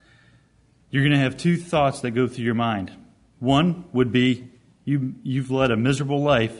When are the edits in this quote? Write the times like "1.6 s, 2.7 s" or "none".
none